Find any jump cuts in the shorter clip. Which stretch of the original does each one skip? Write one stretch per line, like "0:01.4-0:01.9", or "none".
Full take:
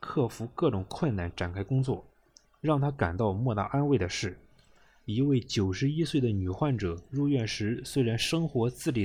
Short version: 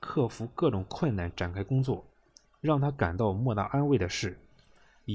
none

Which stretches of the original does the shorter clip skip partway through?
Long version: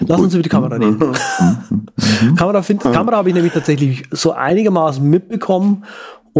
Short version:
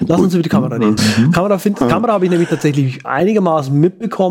0:01.0-0:02.0
0:04.1-0:04.3

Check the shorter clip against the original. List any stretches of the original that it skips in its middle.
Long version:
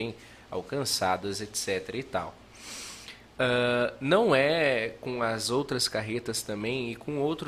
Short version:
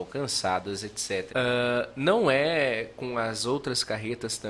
0:01.9-0:03.3

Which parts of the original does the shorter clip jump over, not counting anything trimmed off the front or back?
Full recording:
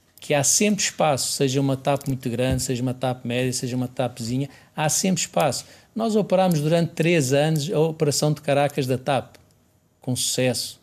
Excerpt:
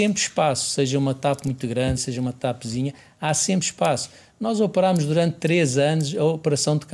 0:02.6-0:03.5

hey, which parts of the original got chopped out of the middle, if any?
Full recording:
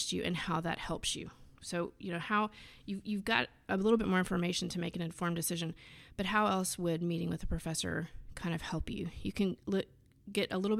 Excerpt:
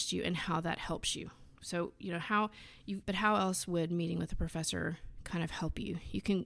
0:03.0-0:06.1

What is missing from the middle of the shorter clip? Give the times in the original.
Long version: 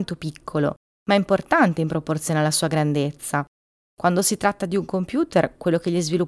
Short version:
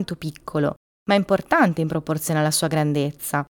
none

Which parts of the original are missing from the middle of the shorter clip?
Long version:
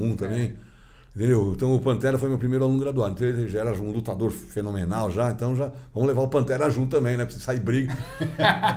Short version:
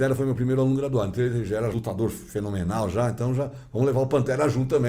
0:03.7-0:03.9

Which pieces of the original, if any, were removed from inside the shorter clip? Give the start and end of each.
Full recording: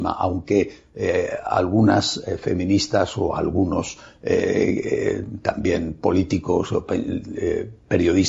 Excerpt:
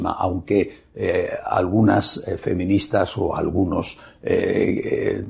none

